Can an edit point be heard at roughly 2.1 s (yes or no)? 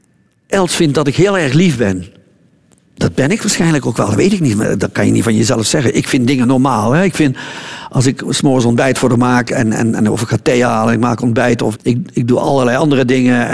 no